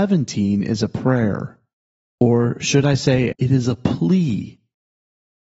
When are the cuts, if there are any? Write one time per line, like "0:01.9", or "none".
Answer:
0:03.3